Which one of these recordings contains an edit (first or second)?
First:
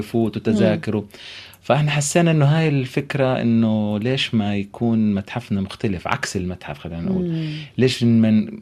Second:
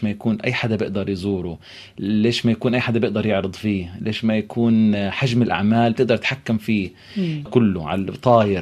second